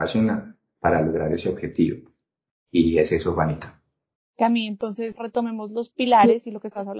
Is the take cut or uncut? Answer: uncut